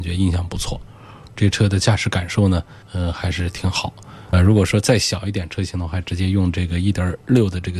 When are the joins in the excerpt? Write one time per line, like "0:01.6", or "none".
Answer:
0:02.8
0:04.3